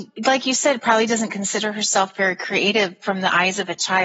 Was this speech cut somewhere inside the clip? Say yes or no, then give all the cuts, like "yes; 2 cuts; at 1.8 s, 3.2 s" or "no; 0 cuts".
yes; 1 cut; at 3.0 s